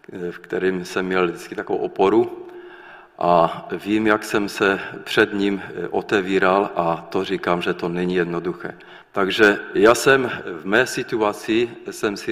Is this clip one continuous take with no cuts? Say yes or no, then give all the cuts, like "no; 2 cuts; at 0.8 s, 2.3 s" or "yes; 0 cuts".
no; 1 cut; at 9.0 s